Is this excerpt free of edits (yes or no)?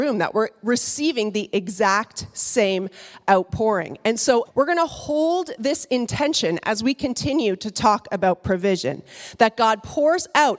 no